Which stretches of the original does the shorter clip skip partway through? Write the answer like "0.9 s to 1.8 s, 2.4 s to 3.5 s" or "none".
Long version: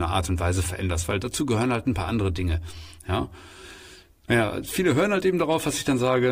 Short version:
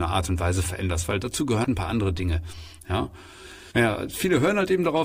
1.6 s to 1.8 s, 3.9 s to 4.3 s